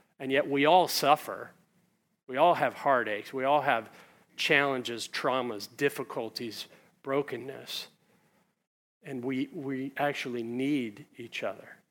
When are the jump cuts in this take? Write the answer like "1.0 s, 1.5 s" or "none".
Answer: none